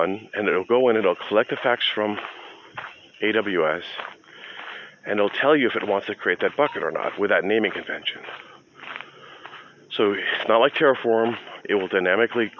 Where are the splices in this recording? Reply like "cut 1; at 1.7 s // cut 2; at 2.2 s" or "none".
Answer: cut 1; at 11.6 s